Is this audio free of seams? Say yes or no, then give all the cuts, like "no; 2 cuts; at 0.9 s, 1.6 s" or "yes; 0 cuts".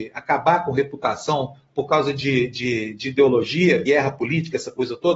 yes; 0 cuts